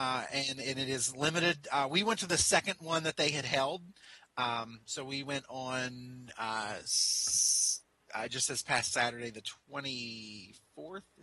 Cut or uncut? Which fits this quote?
uncut